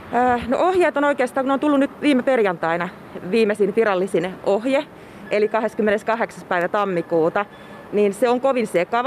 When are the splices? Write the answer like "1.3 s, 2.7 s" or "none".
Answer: 7.9 s